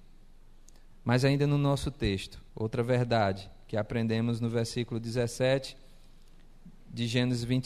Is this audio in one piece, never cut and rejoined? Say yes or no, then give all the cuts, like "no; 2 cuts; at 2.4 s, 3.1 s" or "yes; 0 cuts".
no; 2 cuts; at 0.9 s, 2.5 s